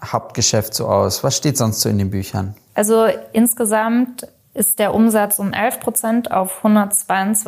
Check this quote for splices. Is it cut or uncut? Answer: uncut